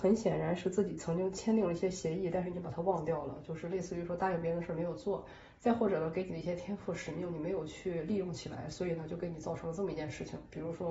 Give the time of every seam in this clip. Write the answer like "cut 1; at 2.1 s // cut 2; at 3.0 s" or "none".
none